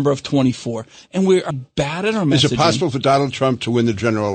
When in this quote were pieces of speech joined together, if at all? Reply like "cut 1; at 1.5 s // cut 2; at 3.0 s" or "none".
cut 1; at 1.5 s

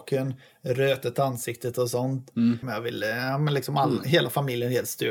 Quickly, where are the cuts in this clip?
cut 1; at 2.6 s

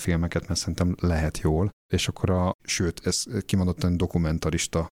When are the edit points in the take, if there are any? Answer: cut 1; at 2.5 s

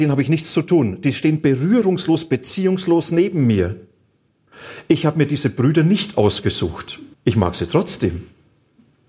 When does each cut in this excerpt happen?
cut 1; at 7.1 s

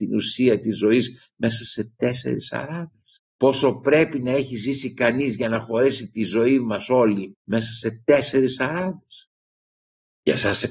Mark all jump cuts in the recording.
cut 1; at 3.3 s

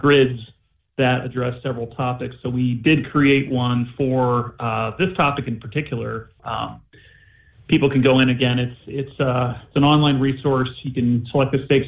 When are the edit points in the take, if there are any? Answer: cut 1; at 6.4 s

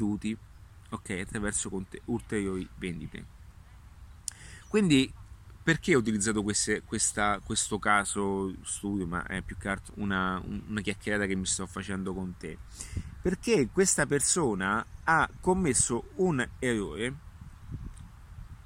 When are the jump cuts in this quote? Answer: cut 1; at 9.9 s

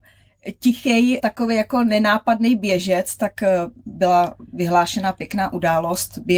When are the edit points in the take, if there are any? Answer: cut 1; at 1.2 s

